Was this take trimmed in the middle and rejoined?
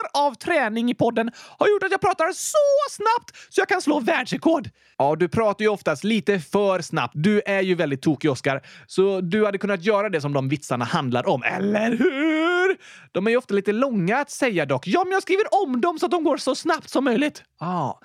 yes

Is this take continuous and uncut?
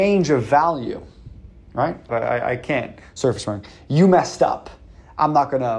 no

